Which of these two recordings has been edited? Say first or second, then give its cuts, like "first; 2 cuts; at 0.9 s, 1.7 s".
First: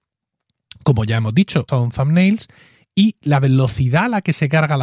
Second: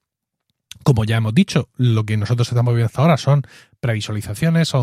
first; 1 cut; at 1.7 s